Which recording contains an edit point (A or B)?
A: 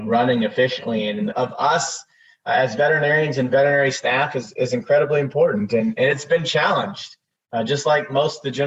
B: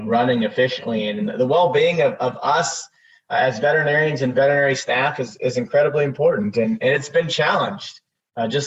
A